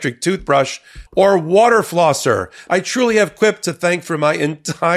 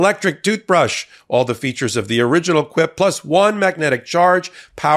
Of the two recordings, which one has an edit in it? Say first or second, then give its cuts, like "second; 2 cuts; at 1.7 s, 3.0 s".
first; 2 cuts; at 1.1 s, 2.7 s